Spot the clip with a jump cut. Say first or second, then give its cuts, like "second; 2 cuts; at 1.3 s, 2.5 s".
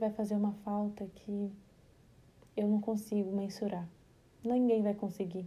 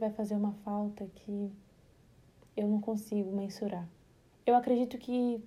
second; 1 cut; at 4.3 s